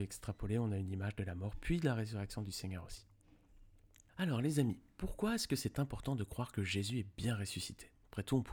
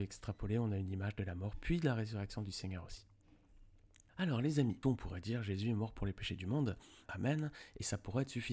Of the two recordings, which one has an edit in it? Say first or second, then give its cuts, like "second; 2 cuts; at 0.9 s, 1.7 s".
second; 2 cuts; at 4.8 s, 7.1 s